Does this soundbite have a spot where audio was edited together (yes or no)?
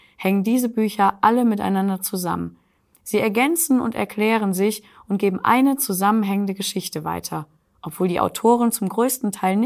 no